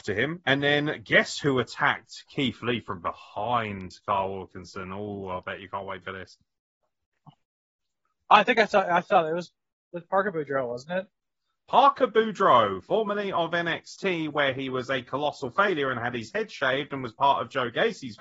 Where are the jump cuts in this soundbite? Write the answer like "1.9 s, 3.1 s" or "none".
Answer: none